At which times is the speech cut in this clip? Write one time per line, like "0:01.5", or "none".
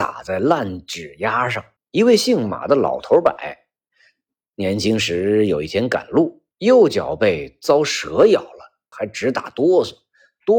0:01.8
0:06.5
0:08.9